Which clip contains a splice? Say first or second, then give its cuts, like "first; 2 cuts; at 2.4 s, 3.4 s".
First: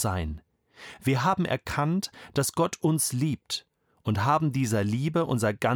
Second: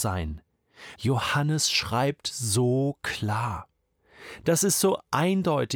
second; 2 cuts; at 1.0 s, 4.4 s